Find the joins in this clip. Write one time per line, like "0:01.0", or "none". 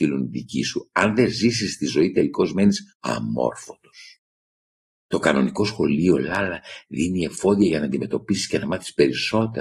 none

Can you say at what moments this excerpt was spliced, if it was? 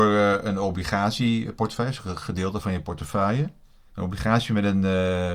0:03.9

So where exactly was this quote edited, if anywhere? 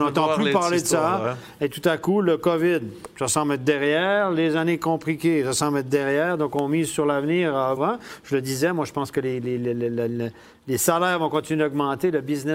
0:07.8

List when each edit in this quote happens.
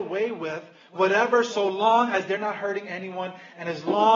none

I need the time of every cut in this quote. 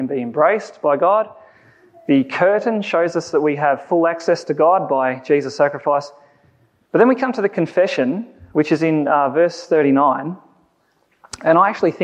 none

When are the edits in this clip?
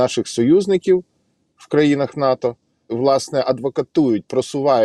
0:02.9

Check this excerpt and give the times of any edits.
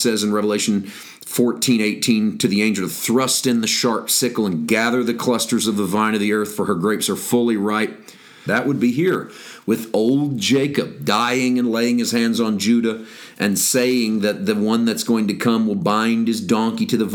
0:08.5

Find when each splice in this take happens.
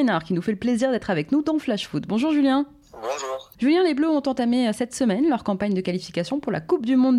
none

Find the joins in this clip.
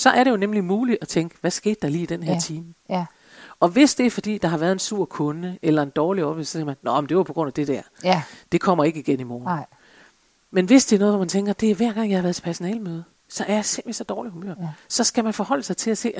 none

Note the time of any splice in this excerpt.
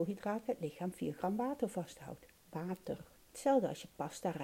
0:03.2

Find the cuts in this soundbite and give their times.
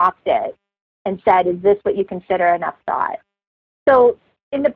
none

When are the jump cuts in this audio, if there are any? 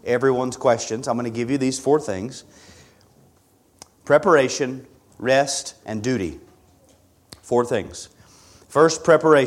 0:05.8

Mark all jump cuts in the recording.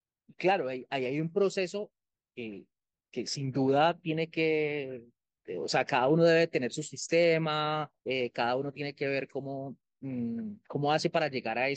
0:08.0

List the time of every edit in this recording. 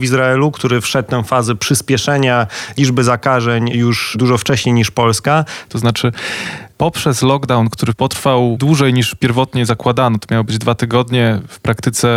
0:05.7

